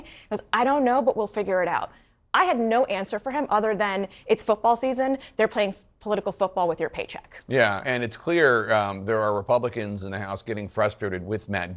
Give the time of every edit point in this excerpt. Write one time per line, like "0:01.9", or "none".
0:07.8